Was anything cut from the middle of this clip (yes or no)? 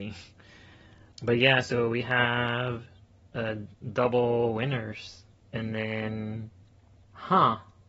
no